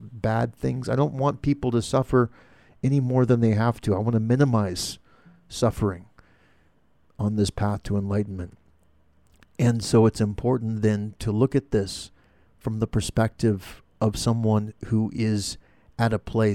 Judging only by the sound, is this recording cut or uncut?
uncut